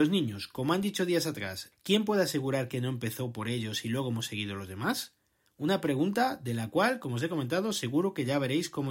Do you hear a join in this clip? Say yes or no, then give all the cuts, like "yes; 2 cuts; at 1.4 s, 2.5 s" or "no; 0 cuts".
yes; 1 cut; at 1.7 s